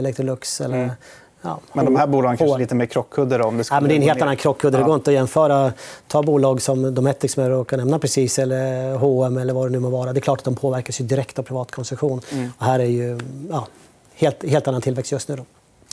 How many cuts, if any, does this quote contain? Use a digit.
0